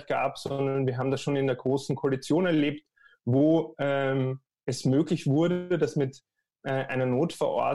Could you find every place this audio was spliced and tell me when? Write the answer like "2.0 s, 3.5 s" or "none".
none